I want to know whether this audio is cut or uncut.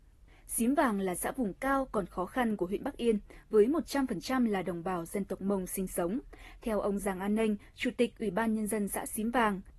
uncut